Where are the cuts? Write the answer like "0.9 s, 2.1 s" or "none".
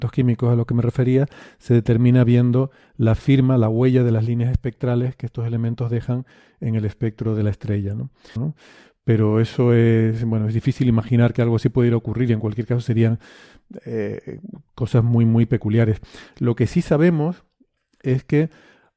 8.4 s